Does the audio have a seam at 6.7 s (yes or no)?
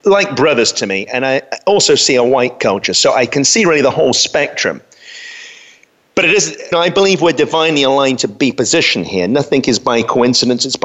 yes